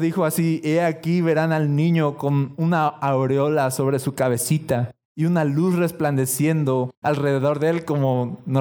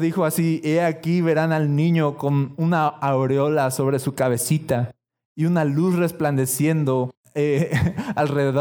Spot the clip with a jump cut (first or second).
first